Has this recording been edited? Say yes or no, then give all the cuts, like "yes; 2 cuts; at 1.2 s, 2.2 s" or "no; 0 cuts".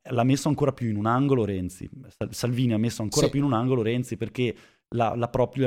no; 0 cuts